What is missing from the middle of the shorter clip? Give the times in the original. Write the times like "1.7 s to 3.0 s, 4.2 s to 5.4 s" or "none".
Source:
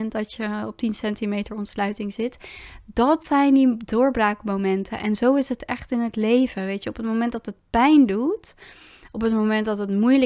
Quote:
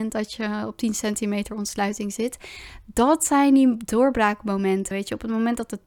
4.9 s to 6.7 s